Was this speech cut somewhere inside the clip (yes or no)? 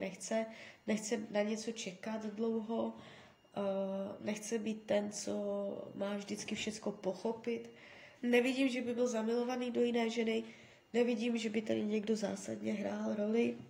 yes